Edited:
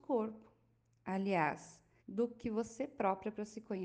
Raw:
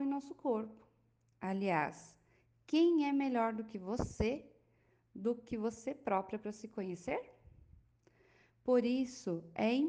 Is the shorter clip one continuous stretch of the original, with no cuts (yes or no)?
no